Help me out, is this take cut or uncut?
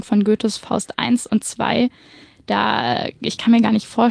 uncut